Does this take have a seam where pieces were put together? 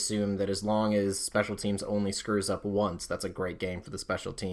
no; 0 cuts

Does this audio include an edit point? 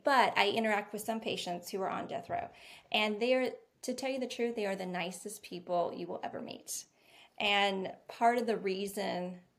no; 0 cuts

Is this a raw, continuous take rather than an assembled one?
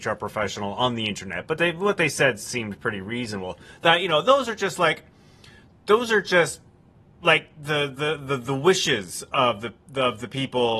yes; 0 cuts

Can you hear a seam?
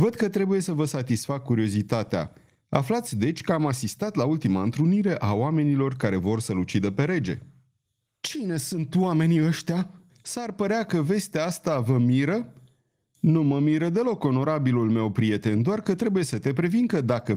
yes; 1 cut; at 10.1 s

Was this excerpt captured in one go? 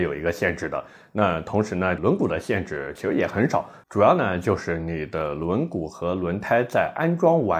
no; 1 cut; at 2.0 s

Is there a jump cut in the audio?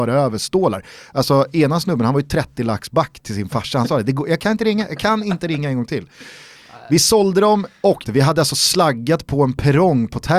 yes; 2 cuts; at 6.5 s, 8.0 s

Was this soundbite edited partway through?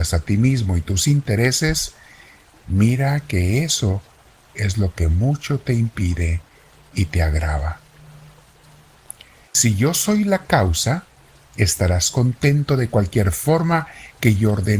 yes; 1 cut; at 9.5 s

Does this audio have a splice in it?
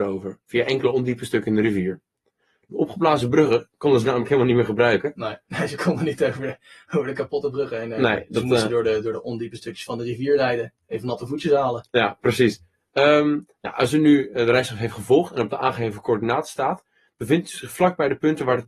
no; 0 cuts

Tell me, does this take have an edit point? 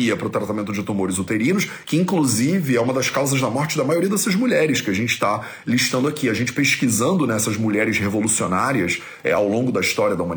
no; 0 cuts

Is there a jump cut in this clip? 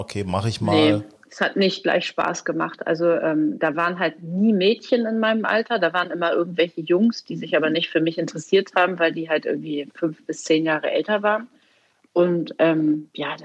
no; 0 cuts

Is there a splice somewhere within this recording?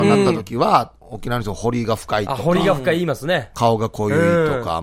no; 0 cuts

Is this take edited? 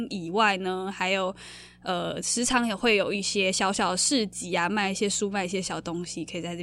no; 0 cuts

